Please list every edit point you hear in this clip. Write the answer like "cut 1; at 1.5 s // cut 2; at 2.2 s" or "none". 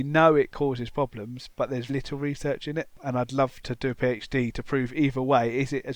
cut 1; at 1.9 s